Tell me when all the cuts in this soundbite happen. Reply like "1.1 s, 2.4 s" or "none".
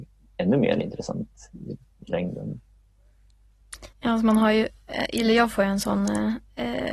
3.9 s